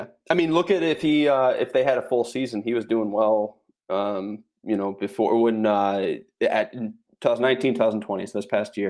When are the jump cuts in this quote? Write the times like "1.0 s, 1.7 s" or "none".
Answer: none